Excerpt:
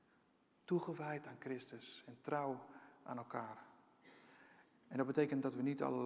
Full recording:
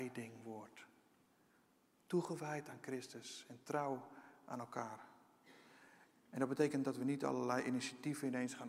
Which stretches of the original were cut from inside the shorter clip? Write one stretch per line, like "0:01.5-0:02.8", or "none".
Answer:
none